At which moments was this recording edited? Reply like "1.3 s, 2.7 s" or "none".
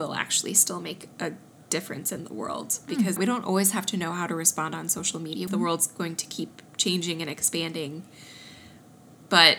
3.2 s, 5.5 s